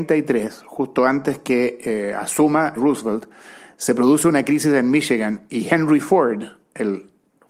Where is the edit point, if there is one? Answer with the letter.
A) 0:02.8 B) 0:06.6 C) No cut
A